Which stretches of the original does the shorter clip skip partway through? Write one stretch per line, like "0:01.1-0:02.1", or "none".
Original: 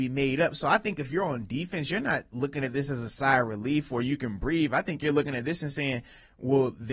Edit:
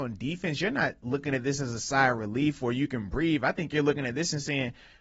none